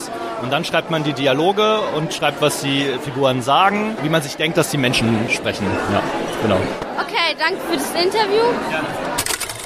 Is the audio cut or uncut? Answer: uncut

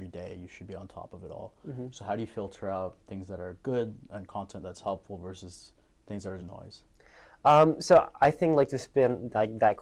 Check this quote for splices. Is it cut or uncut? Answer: cut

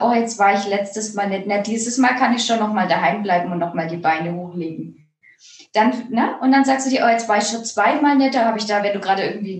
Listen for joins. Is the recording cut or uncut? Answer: uncut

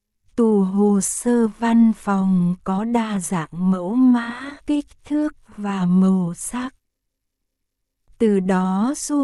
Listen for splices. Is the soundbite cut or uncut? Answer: cut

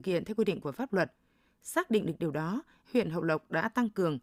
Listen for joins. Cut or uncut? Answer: uncut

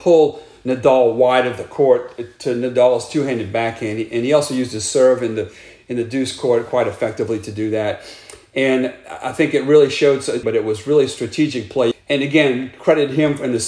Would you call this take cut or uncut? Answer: cut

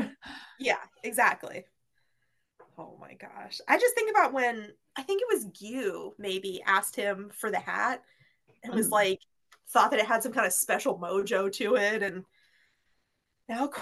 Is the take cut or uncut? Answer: uncut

